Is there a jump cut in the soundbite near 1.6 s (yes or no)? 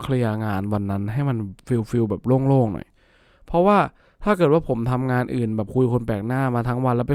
yes